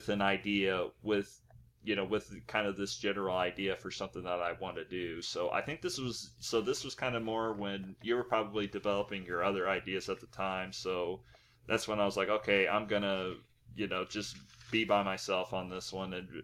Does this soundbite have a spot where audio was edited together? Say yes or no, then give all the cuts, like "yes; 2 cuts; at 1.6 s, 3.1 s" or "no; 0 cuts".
no; 0 cuts